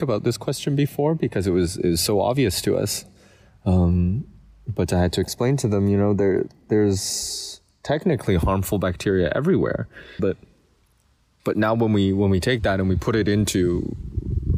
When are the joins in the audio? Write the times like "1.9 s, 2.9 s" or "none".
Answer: 10.2 s